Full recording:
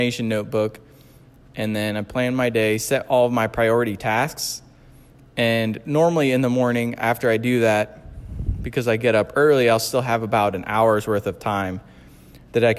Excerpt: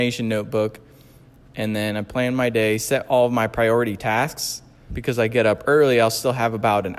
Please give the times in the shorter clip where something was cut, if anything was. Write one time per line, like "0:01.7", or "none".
0:04.9